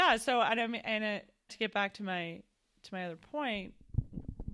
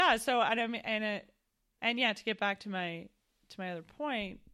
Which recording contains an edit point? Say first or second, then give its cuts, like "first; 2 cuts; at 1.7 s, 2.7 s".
first; 1 cut; at 1.5 s